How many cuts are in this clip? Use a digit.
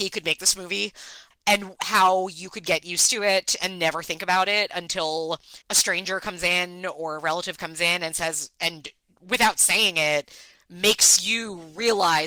2